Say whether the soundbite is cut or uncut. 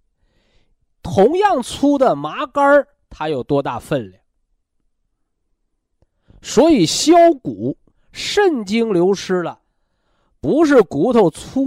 cut